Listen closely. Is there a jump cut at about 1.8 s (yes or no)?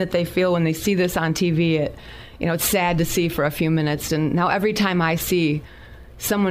no